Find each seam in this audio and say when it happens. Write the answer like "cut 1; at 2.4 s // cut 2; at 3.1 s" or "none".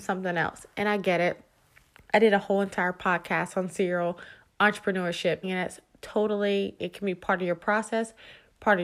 cut 1; at 5.4 s // cut 2; at 6.8 s